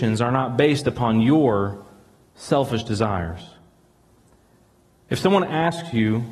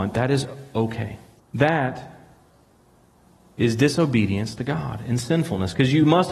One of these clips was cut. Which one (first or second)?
second